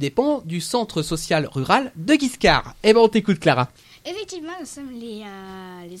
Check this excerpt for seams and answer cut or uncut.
uncut